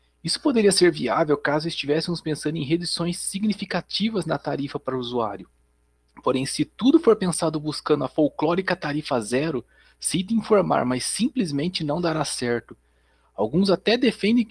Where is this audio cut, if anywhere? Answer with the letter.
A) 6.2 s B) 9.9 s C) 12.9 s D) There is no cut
D